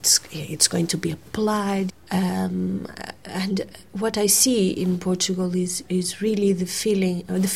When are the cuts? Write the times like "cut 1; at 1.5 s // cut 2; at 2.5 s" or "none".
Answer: cut 1; at 1.9 s // cut 2; at 5.8 s